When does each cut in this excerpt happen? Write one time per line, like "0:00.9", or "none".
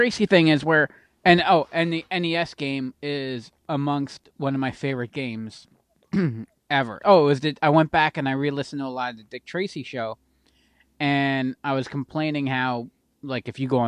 0:07.0

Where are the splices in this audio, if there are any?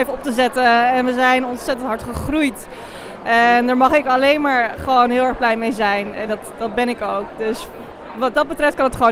none

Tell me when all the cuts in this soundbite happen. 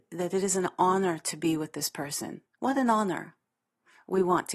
0:02.5

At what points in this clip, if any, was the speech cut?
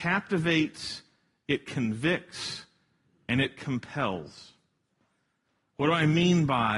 none

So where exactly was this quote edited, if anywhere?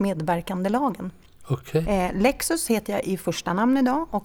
0:01.8

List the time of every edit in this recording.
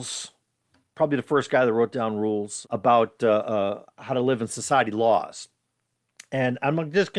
0:02.6

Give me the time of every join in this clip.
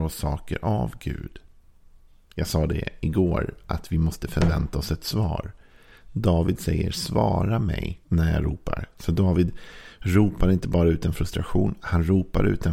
0:08.0

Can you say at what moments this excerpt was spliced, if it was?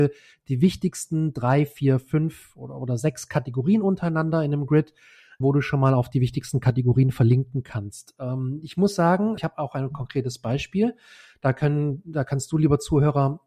0:05.4
0:09.4

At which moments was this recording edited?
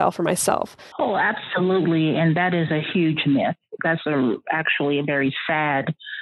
0:00.9

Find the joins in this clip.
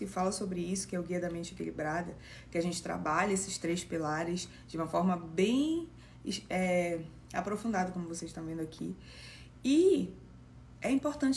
none

